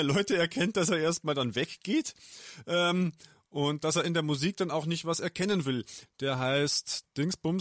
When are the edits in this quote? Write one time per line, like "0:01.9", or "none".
0:06.1